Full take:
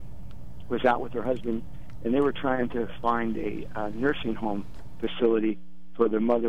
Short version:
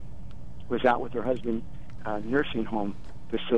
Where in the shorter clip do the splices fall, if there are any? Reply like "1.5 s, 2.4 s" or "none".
2.0 s